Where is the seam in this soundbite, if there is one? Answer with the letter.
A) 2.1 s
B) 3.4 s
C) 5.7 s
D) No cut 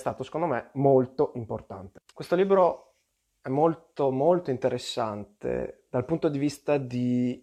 A